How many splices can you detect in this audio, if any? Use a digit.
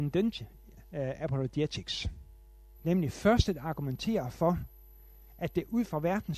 2